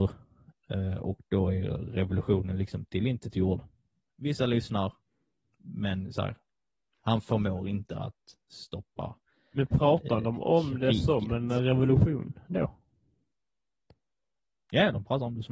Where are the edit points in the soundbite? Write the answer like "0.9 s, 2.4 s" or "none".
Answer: 5.4 s